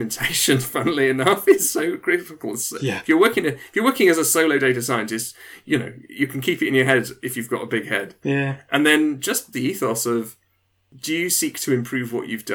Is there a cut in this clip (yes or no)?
yes